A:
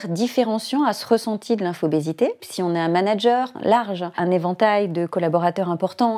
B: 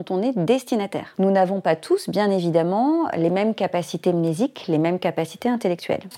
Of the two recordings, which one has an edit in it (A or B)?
A